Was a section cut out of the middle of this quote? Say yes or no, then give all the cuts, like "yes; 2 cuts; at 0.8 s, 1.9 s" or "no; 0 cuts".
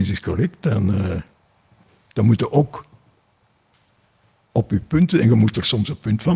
no; 0 cuts